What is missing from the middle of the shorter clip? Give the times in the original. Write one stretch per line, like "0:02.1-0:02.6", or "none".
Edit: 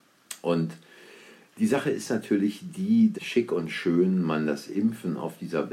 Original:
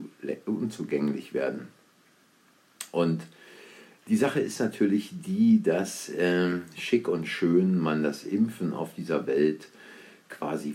0:05.6-0:06.7